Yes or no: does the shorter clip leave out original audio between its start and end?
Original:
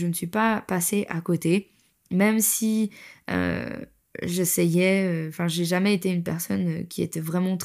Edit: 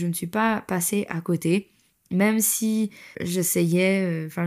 yes